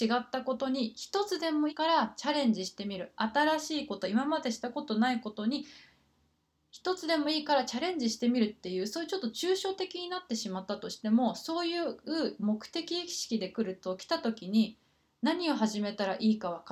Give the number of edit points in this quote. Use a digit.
1